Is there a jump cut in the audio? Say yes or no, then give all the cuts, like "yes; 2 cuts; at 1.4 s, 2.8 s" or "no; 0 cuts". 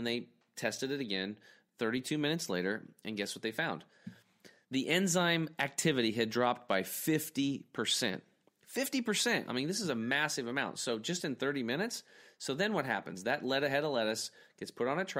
no; 0 cuts